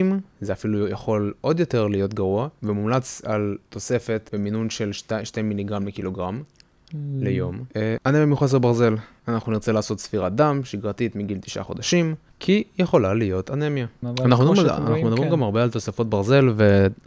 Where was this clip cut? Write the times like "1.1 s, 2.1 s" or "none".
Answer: 8.0 s, 12.3 s, 14.0 s